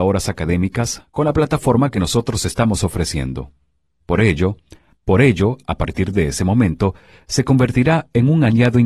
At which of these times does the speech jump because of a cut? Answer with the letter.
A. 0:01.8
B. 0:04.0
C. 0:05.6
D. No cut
B